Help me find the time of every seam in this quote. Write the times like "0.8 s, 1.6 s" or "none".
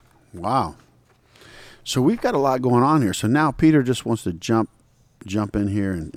none